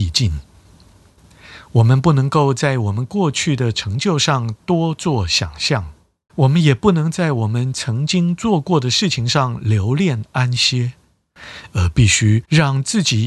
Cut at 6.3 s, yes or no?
yes